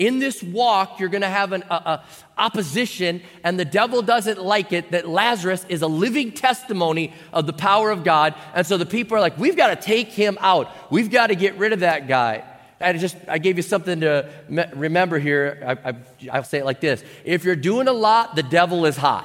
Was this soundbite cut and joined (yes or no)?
yes